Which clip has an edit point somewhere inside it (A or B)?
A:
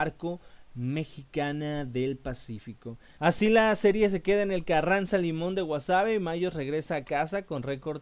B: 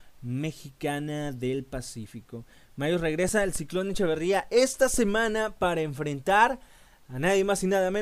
A